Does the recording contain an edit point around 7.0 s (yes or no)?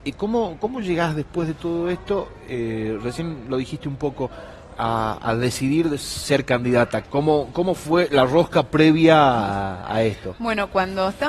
yes